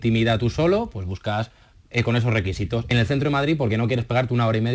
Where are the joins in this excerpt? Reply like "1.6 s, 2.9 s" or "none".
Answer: none